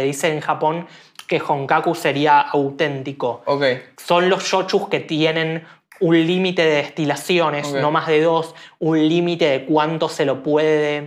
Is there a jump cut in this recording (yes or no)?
no